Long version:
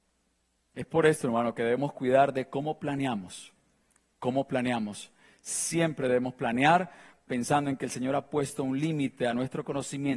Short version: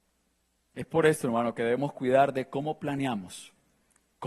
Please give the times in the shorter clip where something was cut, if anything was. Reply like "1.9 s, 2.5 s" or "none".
none